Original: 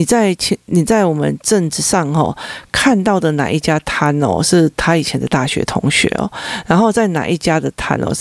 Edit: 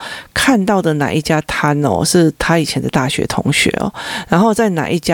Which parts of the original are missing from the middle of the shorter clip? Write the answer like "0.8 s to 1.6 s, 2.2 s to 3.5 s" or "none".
none

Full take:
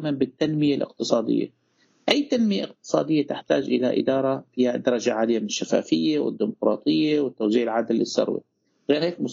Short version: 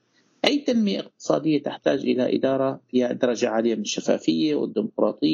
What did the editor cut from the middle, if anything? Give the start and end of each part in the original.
none

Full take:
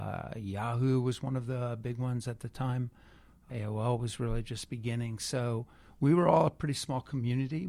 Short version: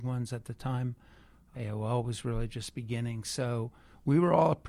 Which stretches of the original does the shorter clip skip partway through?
none

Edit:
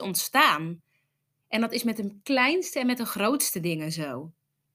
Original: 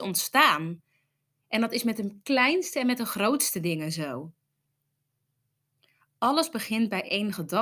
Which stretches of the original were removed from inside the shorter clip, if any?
none

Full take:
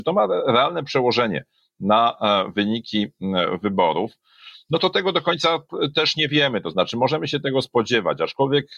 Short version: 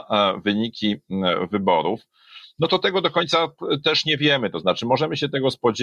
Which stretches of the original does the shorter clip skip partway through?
none

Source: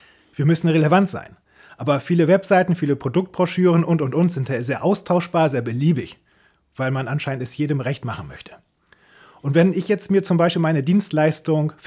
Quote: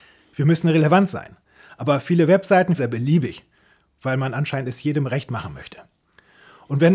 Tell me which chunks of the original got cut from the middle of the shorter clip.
2.8 s to 5.5 s

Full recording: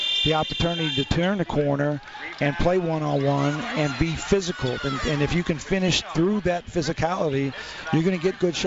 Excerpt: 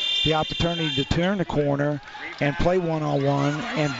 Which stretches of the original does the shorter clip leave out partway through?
none

